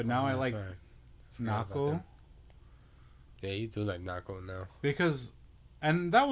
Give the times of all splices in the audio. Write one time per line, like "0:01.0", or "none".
none